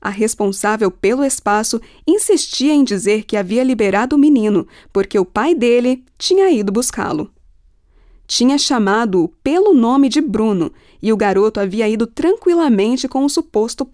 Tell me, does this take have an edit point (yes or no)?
no